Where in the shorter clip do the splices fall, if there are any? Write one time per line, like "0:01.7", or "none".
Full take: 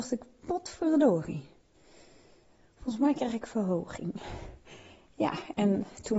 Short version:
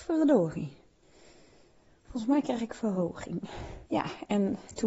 0:03.9